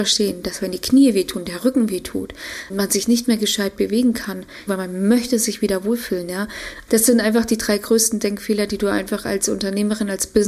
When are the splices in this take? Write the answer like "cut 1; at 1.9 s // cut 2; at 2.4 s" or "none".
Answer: cut 1; at 2.7 s // cut 2; at 4.7 s // cut 3; at 6.9 s